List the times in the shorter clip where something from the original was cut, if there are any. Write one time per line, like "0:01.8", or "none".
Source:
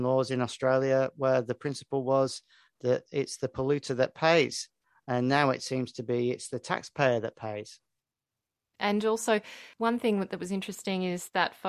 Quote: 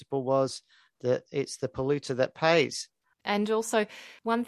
0:03.1